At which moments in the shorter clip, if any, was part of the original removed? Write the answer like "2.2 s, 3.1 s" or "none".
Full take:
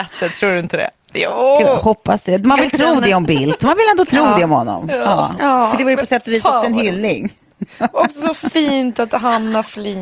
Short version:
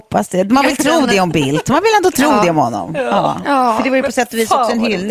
none